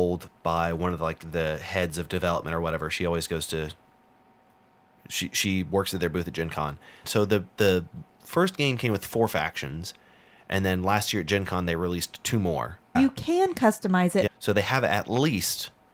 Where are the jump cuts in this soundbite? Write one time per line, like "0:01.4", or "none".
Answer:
0:07.0
0:12.9
0:14.3